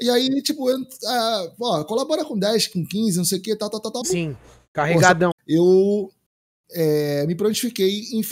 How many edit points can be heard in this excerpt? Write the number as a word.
two